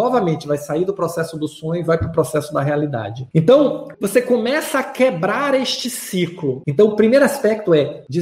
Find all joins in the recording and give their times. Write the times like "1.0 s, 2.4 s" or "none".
3.9 s, 6.6 s